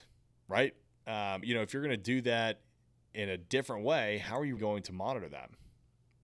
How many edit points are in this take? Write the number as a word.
two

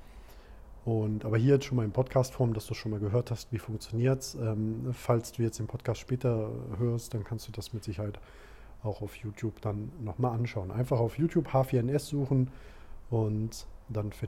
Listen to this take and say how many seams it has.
zero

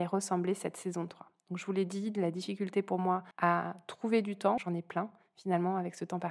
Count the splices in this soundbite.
two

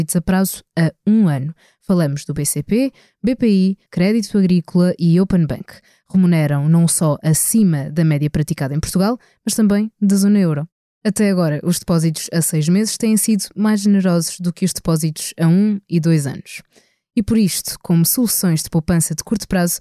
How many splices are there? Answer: one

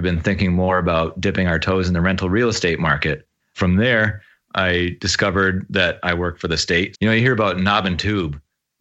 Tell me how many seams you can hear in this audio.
two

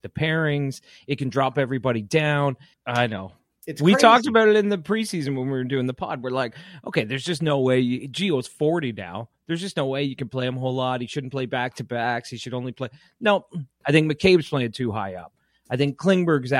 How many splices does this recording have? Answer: two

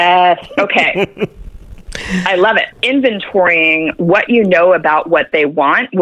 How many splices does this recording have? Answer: one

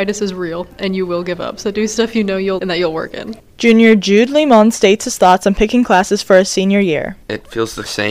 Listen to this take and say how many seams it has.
one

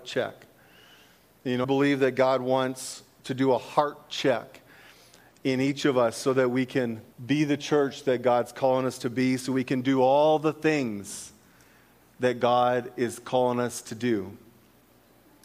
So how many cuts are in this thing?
two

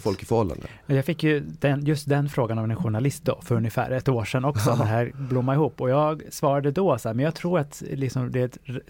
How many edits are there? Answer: zero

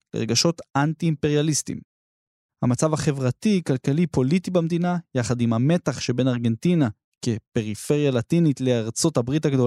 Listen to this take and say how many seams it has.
zero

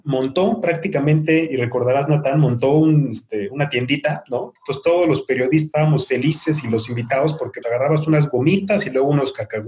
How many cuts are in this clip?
two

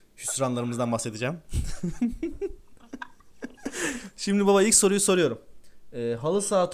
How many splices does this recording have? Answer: zero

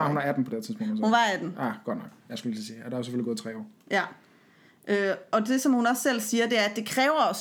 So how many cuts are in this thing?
zero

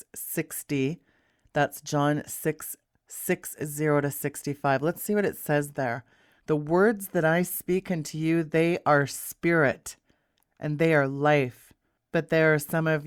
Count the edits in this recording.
one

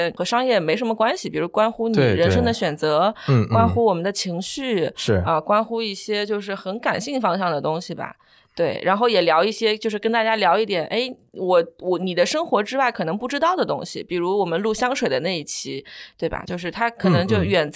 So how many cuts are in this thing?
zero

